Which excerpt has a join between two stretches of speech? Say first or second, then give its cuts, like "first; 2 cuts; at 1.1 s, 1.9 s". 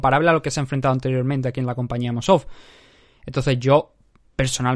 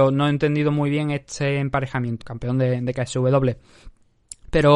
second; 1 cut; at 2.2 s